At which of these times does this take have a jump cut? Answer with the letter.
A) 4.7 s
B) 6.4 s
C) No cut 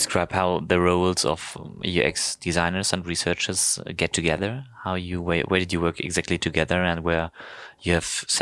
C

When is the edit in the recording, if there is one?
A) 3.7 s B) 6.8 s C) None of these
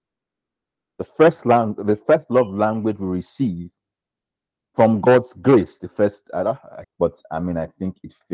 B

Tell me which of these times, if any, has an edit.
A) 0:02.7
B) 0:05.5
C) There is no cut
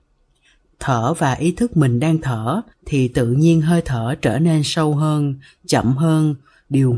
A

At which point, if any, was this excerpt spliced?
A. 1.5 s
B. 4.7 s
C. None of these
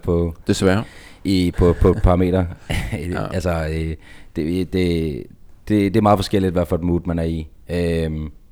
A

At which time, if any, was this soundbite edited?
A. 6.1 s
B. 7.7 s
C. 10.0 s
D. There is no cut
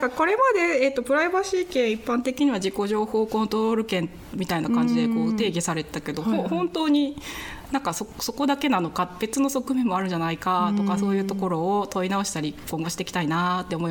D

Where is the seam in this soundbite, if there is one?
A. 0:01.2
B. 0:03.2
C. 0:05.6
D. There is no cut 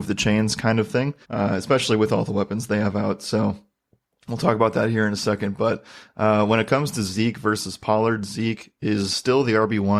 A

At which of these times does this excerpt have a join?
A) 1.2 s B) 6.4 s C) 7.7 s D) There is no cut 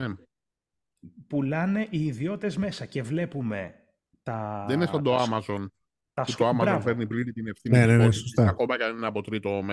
D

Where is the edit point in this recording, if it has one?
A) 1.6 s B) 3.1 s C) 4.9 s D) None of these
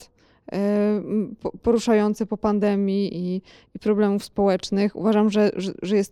D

